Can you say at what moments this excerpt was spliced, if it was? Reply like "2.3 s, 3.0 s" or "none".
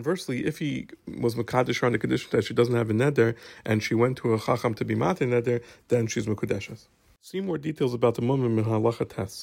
none